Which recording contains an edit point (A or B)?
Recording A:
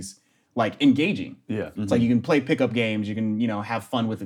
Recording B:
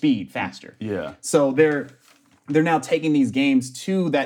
A